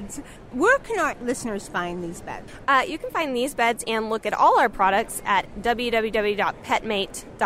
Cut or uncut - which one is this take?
uncut